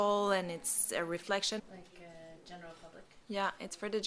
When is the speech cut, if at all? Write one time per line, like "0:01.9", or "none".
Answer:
0:01.6